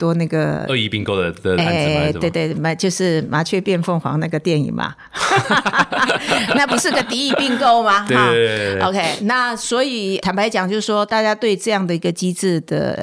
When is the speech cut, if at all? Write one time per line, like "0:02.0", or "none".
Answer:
none